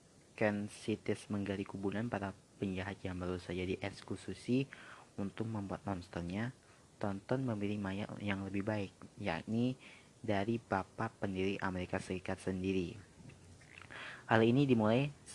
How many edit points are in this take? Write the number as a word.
zero